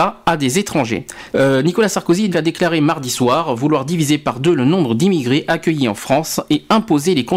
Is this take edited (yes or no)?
yes